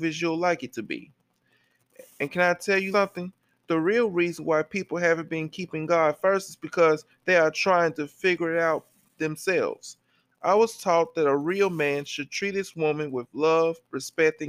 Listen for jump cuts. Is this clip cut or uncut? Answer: cut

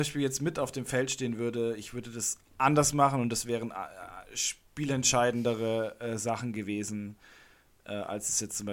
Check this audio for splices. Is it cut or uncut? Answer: uncut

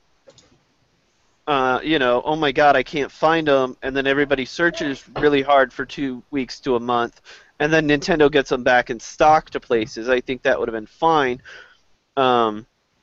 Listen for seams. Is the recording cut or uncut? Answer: uncut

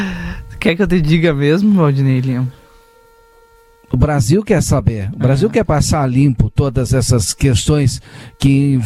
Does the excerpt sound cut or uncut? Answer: uncut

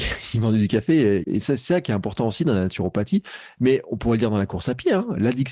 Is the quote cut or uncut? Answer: cut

